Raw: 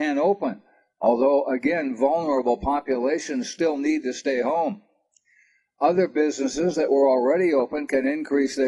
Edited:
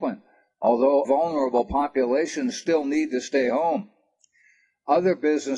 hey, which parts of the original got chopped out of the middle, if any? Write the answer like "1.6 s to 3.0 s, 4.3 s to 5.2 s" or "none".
1.4 s to 2.0 s